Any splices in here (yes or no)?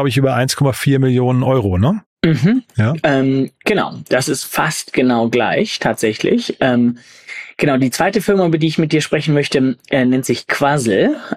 no